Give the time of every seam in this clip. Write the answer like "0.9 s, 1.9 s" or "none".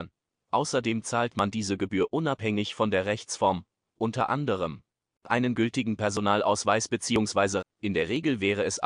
3.8 s, 7.6 s